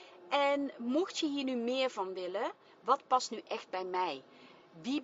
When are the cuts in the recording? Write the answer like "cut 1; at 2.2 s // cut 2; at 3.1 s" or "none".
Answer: cut 1; at 2.6 s